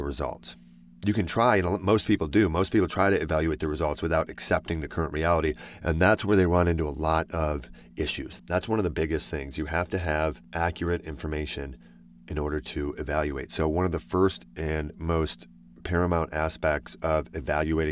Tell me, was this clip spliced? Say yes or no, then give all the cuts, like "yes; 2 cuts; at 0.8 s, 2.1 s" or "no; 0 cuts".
yes; 1 cut; at 8.4 s